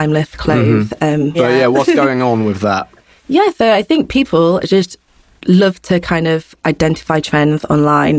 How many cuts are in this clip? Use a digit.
1